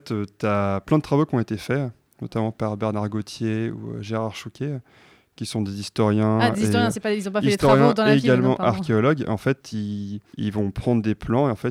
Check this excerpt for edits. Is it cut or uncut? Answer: uncut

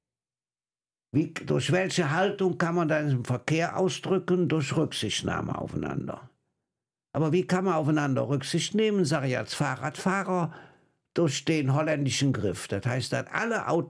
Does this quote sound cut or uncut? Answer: uncut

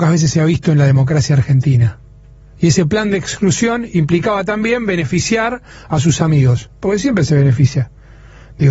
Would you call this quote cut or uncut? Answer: uncut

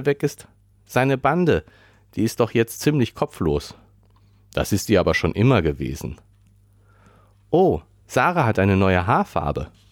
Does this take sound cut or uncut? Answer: uncut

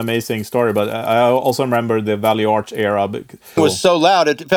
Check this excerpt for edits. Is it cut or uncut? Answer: cut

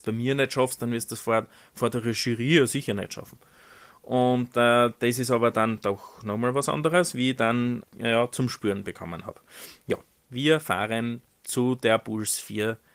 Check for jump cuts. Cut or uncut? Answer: cut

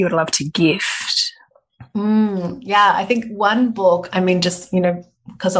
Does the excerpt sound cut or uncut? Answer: uncut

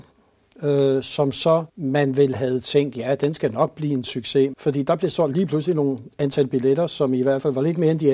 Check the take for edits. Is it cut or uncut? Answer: cut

